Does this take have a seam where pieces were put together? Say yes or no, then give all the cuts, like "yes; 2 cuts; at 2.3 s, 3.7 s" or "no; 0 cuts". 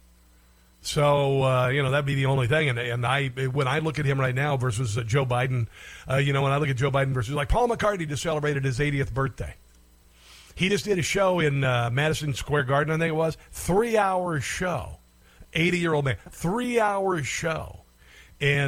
no; 0 cuts